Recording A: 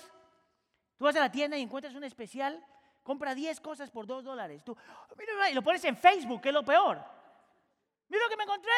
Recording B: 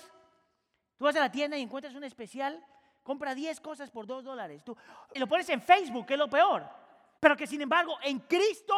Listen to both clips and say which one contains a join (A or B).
B